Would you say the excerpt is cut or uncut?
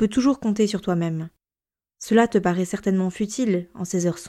uncut